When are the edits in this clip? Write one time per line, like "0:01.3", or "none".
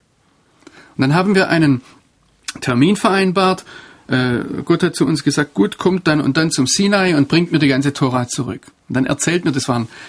none